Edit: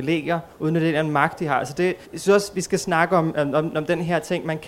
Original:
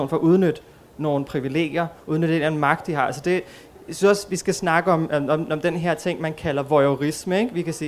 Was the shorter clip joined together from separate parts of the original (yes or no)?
yes